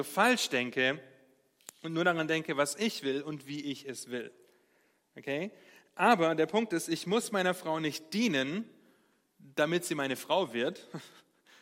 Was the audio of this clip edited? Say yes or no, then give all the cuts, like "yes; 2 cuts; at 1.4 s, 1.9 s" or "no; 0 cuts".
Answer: no; 0 cuts